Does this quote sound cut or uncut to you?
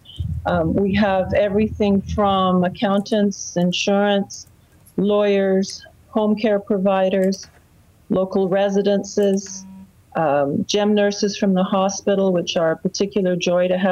uncut